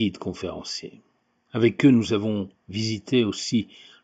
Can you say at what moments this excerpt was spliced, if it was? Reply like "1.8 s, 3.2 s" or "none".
1.5 s